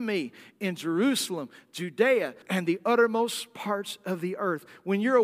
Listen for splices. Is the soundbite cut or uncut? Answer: cut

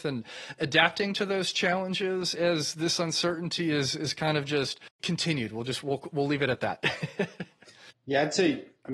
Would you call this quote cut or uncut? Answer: uncut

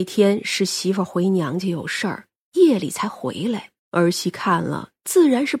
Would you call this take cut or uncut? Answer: cut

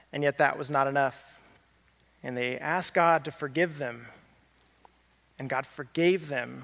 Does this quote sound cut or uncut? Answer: cut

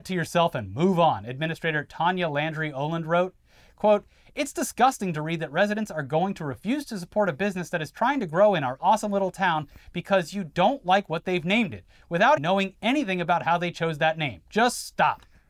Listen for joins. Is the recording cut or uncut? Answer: cut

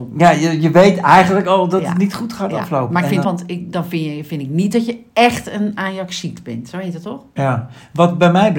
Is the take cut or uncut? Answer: cut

